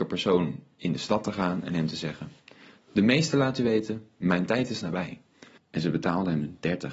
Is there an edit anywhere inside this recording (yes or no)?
yes